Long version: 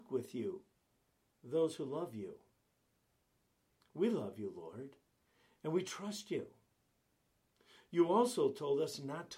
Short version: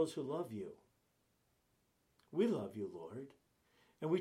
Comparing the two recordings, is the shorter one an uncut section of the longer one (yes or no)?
yes